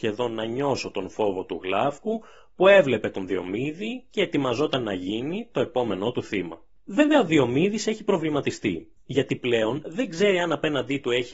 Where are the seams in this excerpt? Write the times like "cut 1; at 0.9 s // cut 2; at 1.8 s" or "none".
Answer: none